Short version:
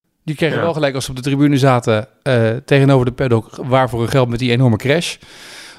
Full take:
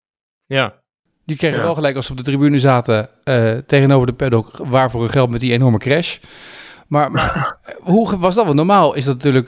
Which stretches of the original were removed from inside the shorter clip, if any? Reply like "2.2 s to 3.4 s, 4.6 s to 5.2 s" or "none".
none